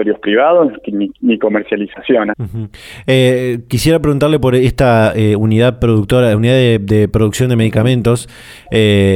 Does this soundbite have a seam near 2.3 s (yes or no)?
yes